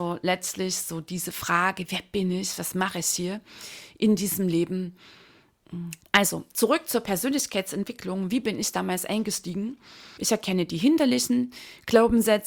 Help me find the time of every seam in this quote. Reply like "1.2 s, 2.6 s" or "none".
6.0 s, 10.2 s